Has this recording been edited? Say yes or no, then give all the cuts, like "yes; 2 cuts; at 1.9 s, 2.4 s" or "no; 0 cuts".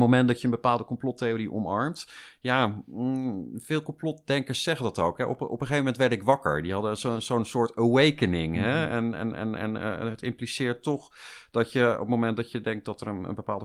yes; 1 cut; at 7.0 s